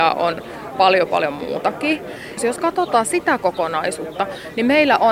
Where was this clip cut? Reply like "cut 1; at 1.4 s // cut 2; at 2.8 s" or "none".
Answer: cut 1; at 2.4 s

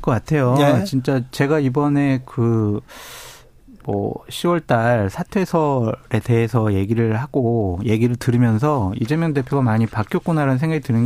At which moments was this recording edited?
none

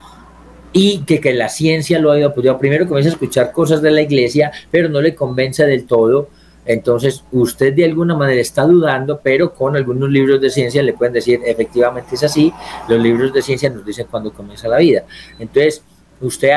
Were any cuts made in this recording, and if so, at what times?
none

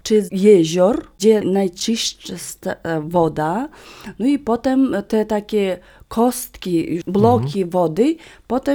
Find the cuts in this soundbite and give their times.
cut 1; at 7.0 s

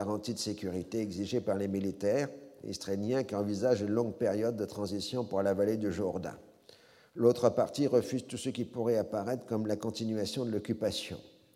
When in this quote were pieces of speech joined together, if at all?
none

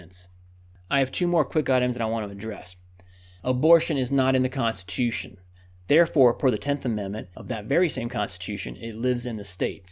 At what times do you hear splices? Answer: cut 1; at 3.4 s

